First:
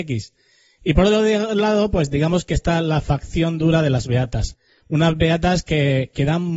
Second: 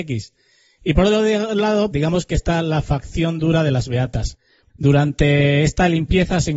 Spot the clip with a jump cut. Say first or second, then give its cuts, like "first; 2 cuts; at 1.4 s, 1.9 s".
second; 2 cuts; at 1.9 s, 4.7 s